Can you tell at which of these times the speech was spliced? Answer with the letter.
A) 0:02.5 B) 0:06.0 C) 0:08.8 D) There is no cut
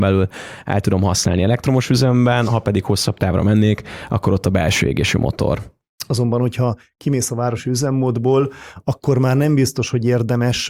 B